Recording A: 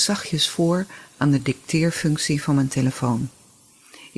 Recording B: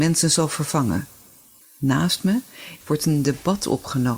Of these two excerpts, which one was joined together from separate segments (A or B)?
B